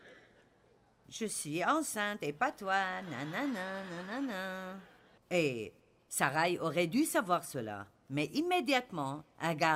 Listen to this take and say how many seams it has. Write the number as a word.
one